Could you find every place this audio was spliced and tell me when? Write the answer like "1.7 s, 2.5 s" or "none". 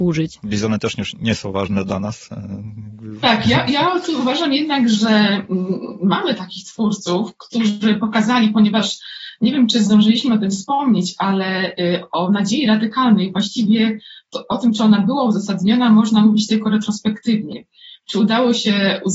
none